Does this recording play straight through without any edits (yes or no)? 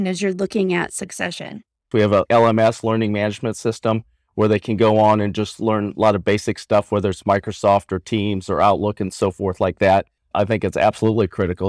no